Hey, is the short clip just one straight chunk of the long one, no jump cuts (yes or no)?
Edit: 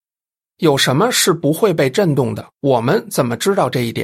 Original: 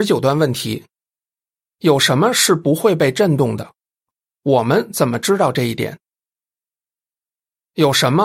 no